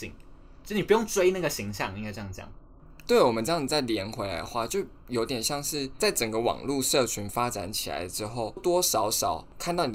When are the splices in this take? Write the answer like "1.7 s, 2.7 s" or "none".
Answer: 8.6 s